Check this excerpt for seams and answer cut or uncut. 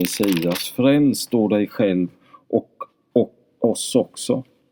uncut